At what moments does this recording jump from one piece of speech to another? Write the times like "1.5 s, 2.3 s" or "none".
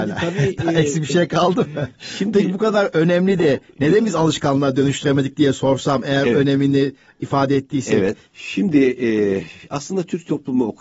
8.3 s